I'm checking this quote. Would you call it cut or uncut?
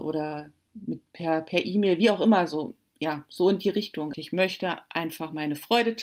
cut